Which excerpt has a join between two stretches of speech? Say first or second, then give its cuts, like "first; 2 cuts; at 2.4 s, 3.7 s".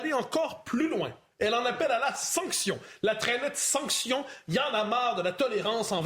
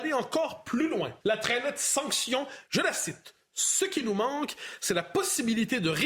second; 2 cuts; at 1.2 s, 2.7 s